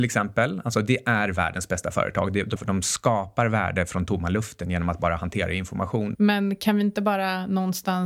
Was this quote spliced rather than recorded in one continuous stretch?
yes; 2 cuts; at 2.6 s, 6.1 s

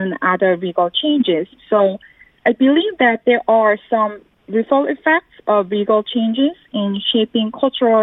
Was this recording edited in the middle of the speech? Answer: no; 0 cuts

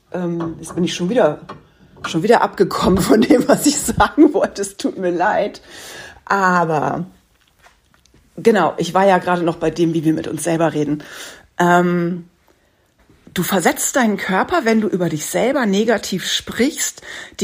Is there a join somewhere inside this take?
no; 0 cuts

